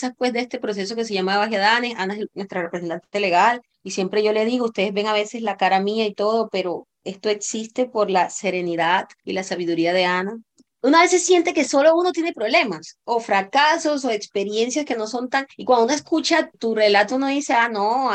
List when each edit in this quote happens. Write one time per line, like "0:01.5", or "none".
none

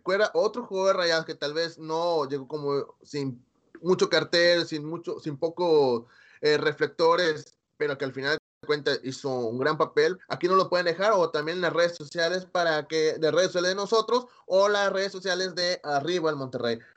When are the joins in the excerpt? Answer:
0:10.2

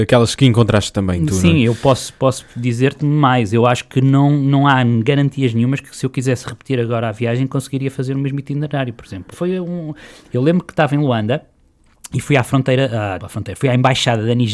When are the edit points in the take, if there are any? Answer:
0:09.3
0:13.2

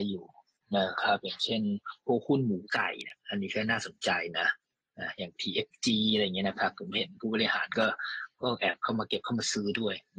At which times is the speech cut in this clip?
none

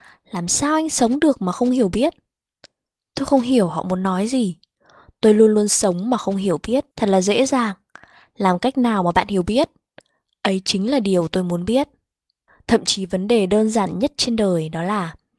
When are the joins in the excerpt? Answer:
0:06.9

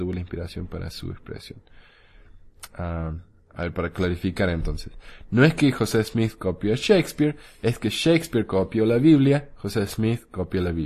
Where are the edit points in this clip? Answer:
none

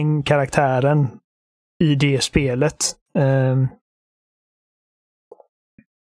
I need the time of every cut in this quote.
0:03.1

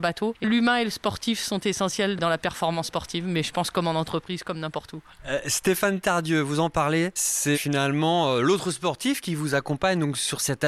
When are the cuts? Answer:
0:07.5

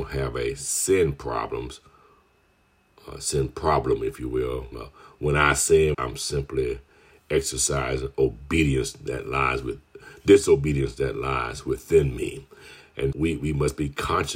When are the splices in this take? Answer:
0:04.7
0:05.9
0:13.1

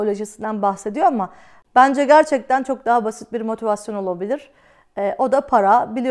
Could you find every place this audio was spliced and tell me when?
none

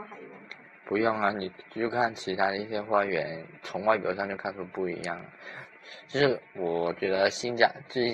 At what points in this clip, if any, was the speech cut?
0:03.6
0:06.5

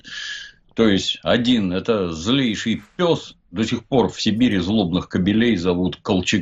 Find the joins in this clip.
none

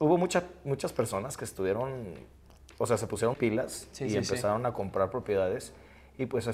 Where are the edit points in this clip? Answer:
0:03.3

